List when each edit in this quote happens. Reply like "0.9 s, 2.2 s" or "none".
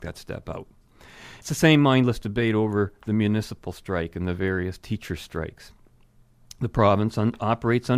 none